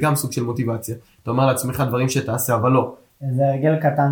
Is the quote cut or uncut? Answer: cut